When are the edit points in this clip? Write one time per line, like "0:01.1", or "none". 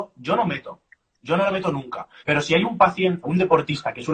0:02.2
0:03.2